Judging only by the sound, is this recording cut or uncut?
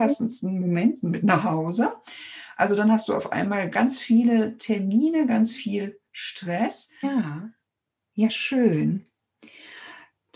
cut